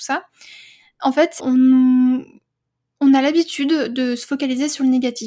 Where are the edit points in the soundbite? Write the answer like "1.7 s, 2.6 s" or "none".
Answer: 1.4 s